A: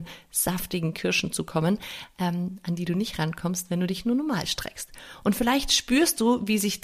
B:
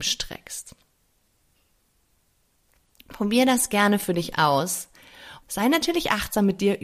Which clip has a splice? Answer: B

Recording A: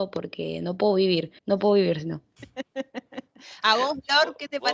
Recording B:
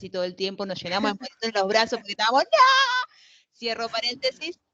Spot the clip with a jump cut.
A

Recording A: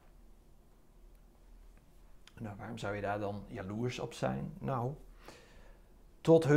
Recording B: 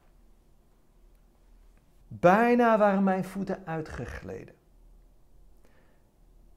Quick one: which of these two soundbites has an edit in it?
B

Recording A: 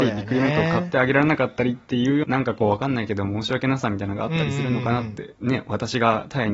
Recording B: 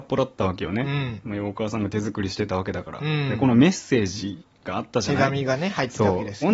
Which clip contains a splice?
A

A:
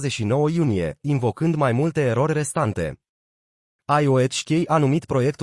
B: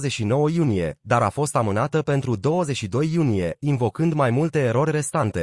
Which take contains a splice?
A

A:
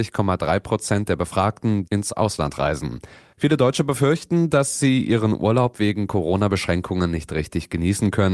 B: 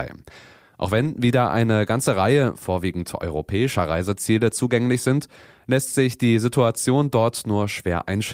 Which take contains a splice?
A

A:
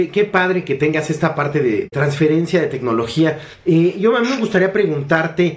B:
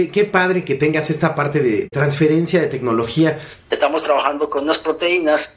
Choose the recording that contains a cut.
B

